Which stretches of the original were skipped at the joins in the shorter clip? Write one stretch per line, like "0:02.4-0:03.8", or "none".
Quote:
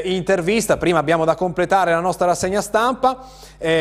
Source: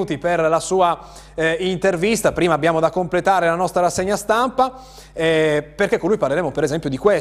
none